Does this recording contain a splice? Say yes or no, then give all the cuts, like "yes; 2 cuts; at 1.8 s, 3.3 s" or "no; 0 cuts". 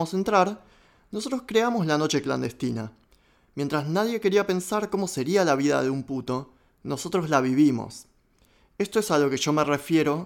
no; 0 cuts